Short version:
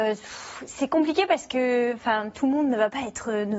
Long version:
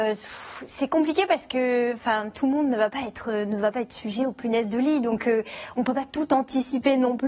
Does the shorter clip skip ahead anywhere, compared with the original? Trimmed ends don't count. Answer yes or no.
no